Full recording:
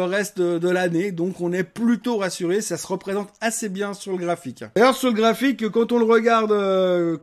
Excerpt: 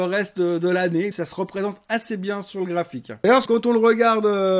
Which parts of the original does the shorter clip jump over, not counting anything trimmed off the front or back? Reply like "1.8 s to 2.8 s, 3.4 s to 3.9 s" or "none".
1.1 s to 2.6 s, 5.0 s to 5.7 s